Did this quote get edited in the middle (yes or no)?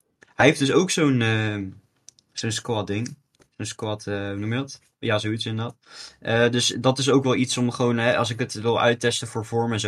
yes